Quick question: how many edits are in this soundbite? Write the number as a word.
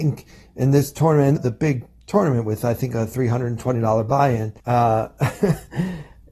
two